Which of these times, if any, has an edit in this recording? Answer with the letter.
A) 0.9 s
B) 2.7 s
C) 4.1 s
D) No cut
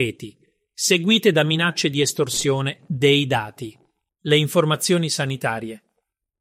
C